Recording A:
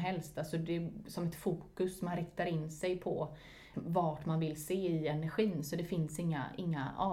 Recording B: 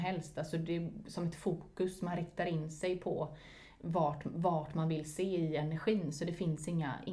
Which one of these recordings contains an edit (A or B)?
A